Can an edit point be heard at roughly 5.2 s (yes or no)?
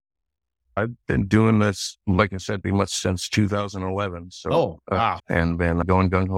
yes